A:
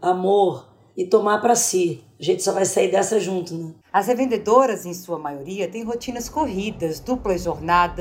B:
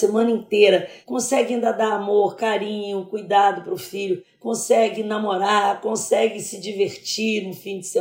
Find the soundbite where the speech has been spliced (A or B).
A